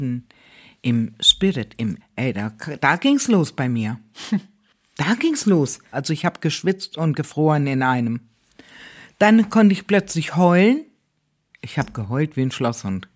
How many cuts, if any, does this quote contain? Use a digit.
2